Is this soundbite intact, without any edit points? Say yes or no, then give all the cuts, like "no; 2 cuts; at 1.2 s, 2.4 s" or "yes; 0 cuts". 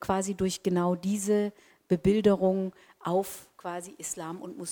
yes; 0 cuts